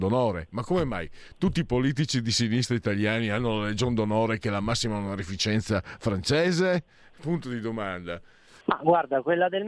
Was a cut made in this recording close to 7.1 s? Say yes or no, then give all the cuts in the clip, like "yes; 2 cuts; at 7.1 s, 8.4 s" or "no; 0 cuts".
no; 1 cut; at 8.6 s